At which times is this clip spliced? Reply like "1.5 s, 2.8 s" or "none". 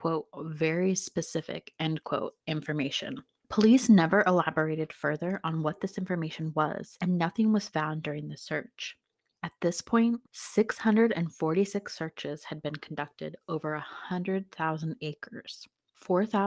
10.3 s